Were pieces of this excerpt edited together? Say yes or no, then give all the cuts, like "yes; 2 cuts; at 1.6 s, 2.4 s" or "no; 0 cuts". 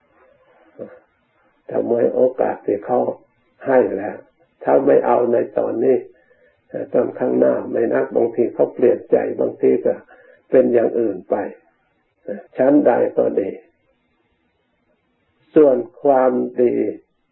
yes; 2 cuts; at 7.9 s, 12.5 s